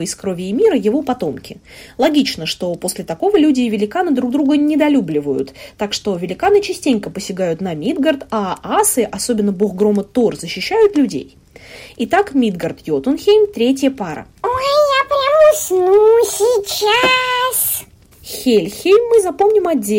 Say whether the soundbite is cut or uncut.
cut